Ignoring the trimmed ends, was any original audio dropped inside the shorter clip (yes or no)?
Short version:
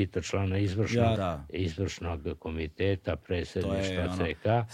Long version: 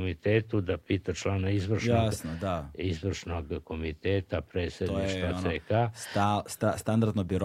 yes